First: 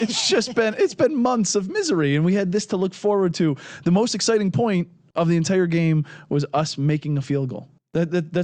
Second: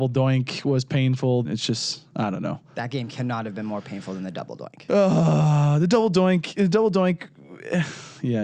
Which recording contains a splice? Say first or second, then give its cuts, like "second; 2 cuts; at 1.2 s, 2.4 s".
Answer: second; 1 cut; at 1.4 s